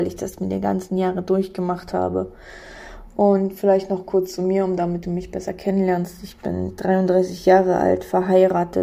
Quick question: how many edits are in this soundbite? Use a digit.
0